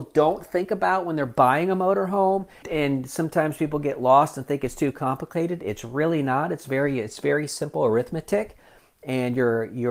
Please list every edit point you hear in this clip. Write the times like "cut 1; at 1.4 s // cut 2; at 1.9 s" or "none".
cut 1; at 2.6 s